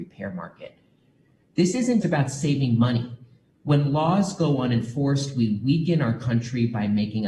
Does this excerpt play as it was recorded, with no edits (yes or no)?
no